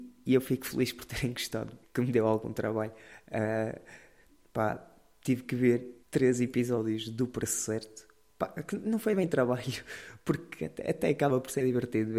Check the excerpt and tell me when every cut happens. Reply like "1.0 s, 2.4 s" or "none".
1.8 s, 6.0 s